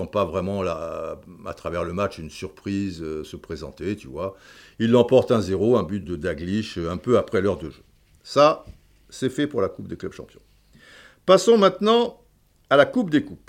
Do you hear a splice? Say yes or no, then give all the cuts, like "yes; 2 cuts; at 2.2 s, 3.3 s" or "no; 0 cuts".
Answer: yes; 1 cut; at 6.0 s